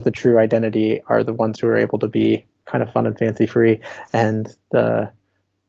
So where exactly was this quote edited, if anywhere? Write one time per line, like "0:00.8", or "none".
none

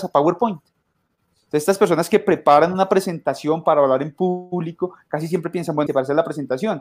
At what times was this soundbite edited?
0:05.9

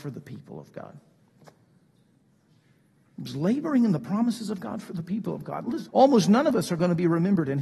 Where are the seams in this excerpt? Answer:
0:05.9

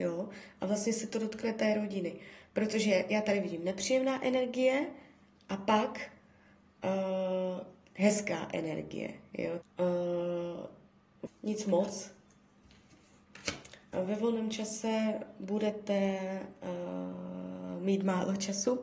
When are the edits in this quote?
0:09.6
0:11.3

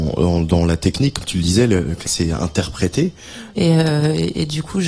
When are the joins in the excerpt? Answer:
0:02.1
0:03.5

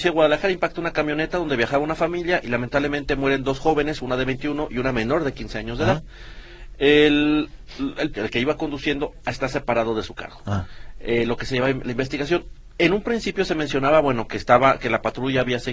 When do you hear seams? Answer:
0:08.1

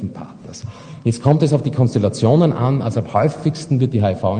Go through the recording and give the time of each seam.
none

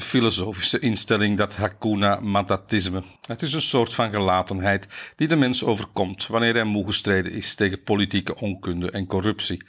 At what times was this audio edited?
0:03.2

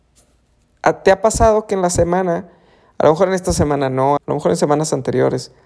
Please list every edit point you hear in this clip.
0:04.2

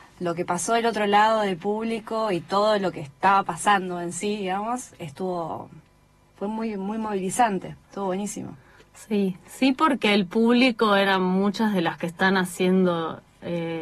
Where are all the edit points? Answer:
none

